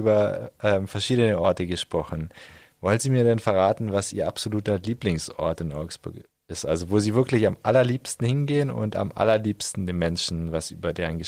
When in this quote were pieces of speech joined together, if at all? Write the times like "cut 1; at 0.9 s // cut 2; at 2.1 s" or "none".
none